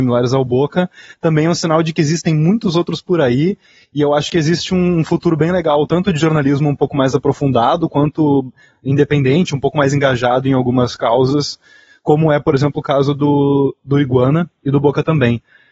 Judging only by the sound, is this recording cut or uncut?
uncut